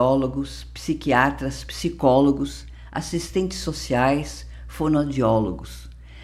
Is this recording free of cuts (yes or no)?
yes